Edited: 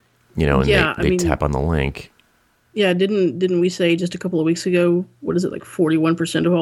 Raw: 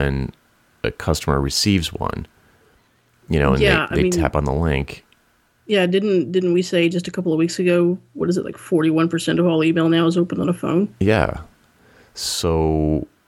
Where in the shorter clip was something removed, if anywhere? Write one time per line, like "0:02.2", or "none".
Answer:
none